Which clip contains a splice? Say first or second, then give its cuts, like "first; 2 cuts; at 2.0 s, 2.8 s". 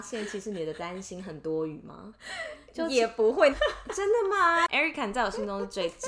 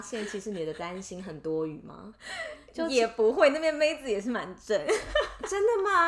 first; 1 cut; at 3.5 s